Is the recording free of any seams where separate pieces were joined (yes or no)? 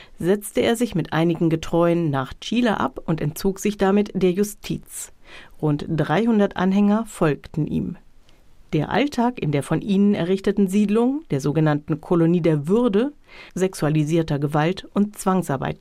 no